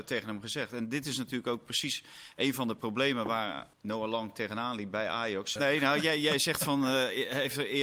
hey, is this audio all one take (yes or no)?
no